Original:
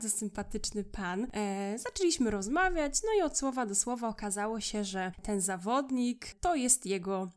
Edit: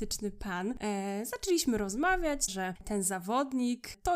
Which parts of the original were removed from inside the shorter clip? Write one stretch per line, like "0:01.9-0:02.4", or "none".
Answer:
0:03.0-0:04.9

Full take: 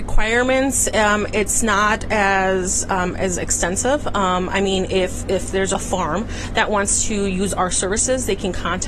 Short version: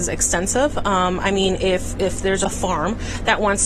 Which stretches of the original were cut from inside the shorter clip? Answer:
none

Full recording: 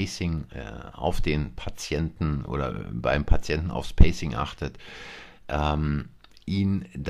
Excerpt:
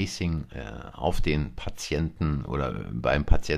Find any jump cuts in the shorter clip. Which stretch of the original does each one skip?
none

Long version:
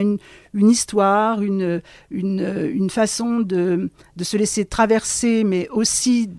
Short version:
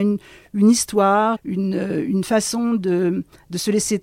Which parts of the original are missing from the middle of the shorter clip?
0:01.4-0:02.0

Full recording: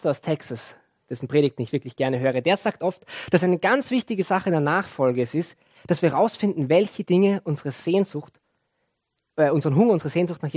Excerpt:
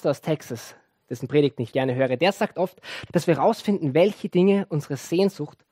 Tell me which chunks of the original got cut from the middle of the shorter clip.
0:01.7-0:02.0
0:03.3-0:05.8

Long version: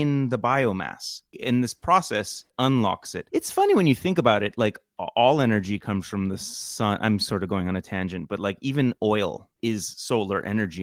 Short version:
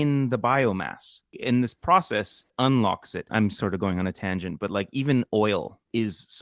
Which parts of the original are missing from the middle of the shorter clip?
0:03.3-0:07.0

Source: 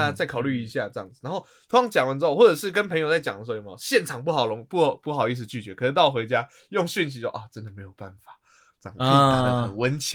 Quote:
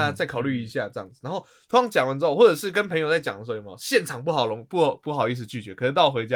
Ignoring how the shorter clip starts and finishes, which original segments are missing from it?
none

